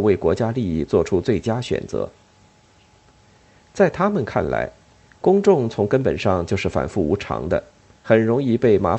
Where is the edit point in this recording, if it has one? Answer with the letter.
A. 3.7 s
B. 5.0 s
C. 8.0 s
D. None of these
D